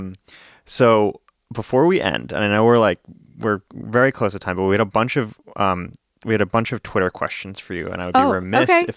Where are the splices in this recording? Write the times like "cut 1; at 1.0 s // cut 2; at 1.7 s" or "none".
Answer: none